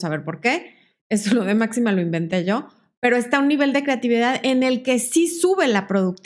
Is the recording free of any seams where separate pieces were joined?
yes; 0 cuts

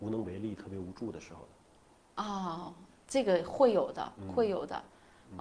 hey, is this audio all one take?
yes; 0 cuts

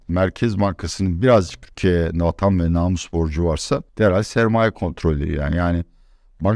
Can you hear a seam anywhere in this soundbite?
yes; 1 cut; at 3.9 s

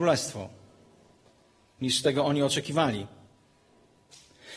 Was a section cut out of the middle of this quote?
no; 0 cuts

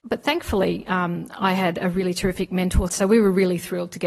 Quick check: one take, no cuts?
no; 1 cut; at 2.9 s

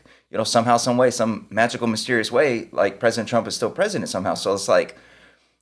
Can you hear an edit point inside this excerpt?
no; 0 cuts

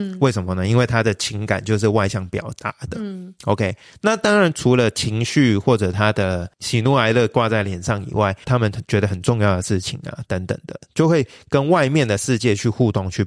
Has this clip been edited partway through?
yes; 1 cut; at 8.4 s

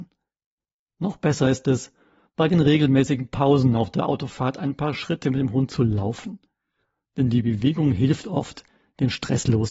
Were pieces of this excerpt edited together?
no; 0 cuts

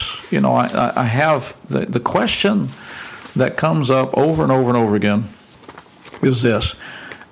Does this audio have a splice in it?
no; 0 cuts

